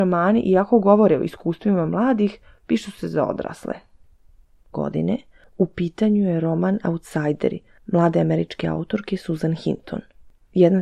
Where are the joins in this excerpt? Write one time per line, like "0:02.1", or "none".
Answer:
0:04.7